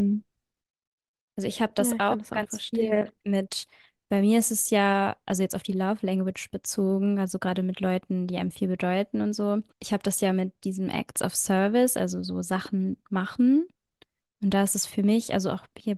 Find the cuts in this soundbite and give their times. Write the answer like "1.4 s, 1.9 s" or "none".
9.7 s

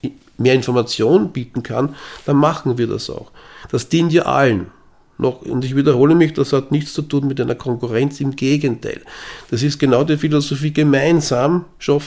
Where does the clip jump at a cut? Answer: none

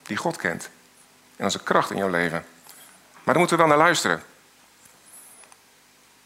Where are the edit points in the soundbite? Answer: none

